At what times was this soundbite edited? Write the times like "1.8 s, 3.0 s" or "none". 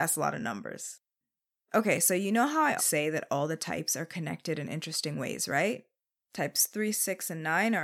2.8 s, 6.1 s